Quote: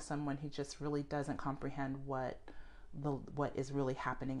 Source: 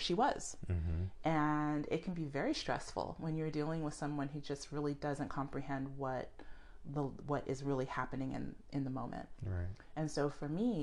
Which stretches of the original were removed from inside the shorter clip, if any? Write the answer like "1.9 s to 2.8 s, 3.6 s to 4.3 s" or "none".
none